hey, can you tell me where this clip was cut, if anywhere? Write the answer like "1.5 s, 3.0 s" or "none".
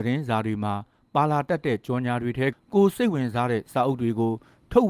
2.5 s